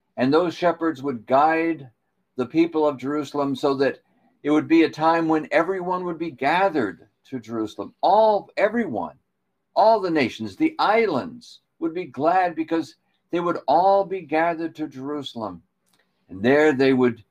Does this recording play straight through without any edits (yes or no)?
yes